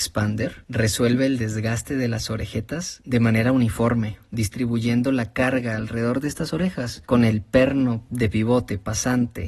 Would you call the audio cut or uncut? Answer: uncut